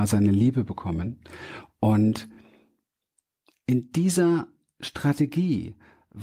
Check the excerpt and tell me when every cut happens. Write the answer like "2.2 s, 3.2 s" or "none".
none